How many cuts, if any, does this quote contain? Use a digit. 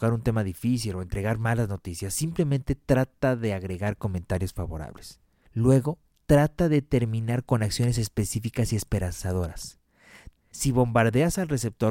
2